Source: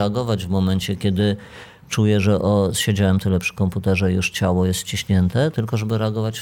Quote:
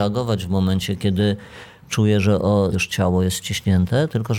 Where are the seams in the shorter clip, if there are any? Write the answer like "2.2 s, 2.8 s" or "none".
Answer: 2.7 s